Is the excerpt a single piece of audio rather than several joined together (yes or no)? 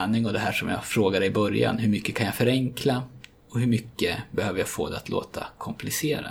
yes